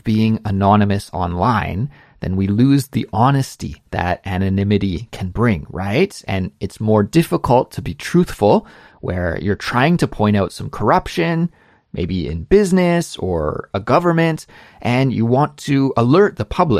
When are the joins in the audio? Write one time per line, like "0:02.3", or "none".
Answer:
0:08.9